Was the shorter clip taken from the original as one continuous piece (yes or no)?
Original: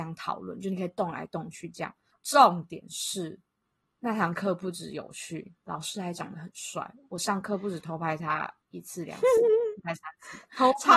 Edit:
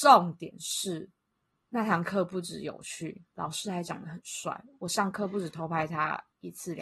yes